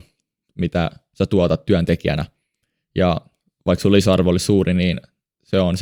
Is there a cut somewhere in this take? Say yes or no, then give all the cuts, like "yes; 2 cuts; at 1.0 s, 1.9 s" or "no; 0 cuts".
no; 0 cuts